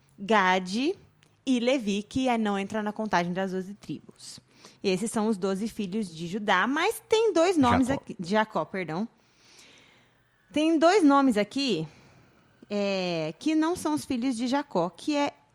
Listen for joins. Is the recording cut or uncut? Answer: uncut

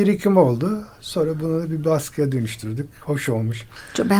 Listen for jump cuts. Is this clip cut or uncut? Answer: uncut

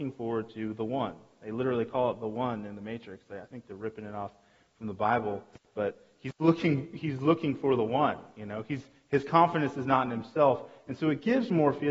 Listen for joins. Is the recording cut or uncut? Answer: uncut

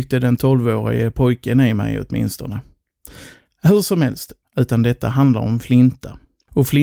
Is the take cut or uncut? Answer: cut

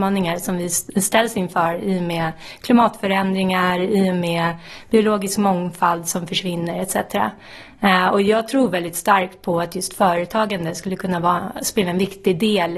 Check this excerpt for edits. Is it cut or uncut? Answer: uncut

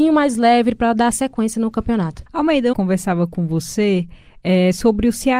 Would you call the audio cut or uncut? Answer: cut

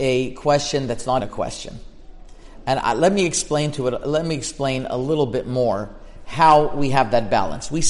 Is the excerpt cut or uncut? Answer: cut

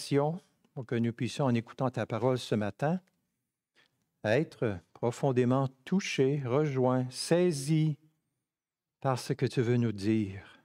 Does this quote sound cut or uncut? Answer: uncut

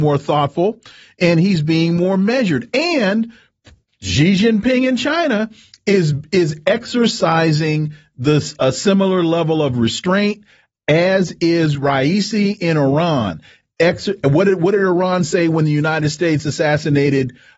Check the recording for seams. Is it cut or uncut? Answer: uncut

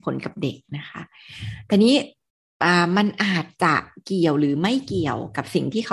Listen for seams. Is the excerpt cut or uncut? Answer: uncut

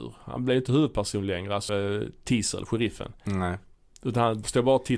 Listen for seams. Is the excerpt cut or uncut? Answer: cut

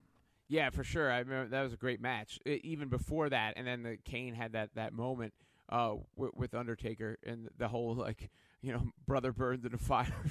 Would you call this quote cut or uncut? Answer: uncut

